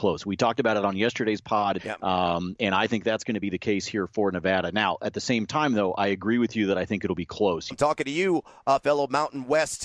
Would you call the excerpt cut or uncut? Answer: cut